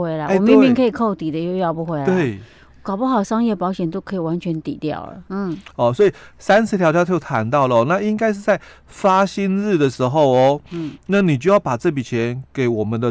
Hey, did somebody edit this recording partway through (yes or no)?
yes